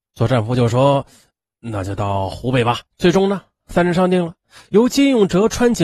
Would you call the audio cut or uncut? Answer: cut